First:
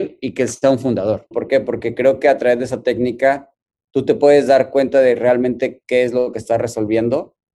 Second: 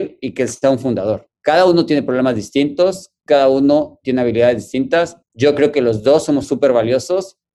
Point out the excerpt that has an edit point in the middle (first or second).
first